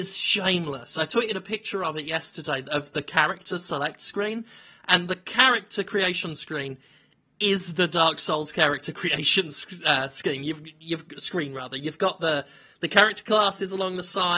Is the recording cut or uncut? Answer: uncut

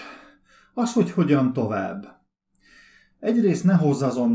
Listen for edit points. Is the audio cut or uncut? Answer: uncut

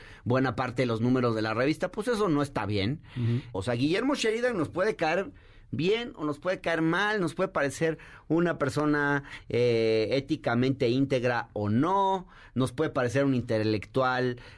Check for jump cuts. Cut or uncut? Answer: cut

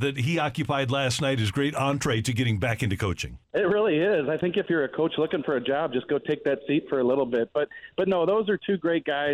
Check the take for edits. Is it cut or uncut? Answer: cut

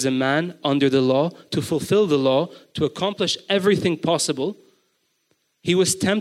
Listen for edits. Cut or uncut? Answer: uncut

